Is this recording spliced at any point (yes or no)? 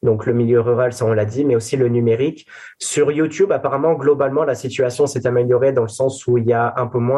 no